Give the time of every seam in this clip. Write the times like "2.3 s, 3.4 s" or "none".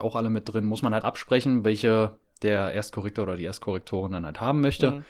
1.0 s

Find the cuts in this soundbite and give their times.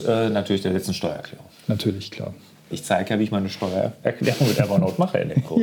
2.7 s

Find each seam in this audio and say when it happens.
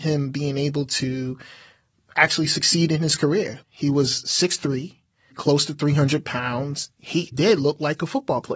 3.6 s, 5.3 s, 7.3 s

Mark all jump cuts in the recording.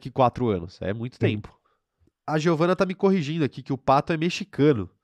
2.1 s

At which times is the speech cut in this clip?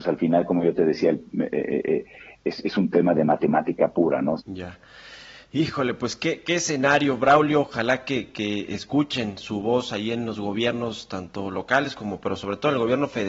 4.4 s

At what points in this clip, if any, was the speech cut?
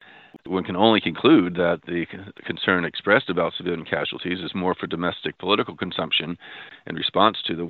none

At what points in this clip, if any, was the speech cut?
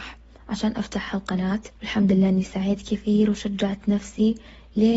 1.8 s

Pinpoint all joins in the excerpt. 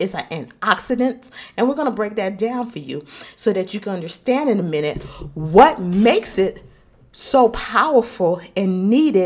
none

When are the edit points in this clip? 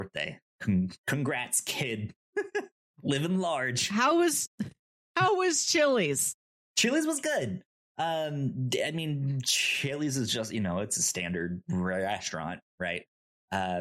none

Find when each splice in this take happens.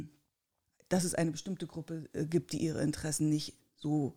none

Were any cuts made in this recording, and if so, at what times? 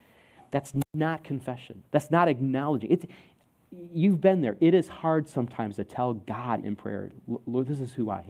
1.9 s, 6.6 s

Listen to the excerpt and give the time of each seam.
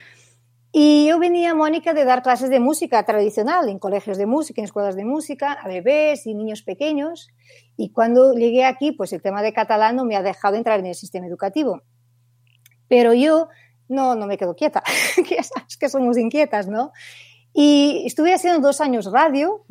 none

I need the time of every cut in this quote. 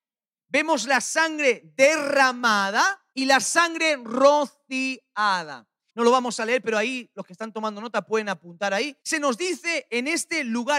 3.1 s, 5.9 s, 9.0 s

